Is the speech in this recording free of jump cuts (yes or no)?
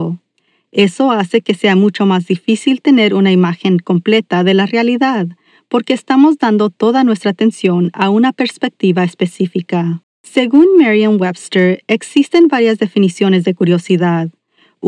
no